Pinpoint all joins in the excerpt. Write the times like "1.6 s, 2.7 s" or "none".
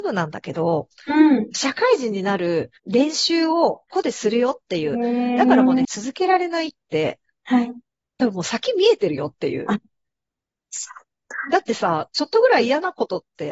2.8 s, 3.9 s, 5.8 s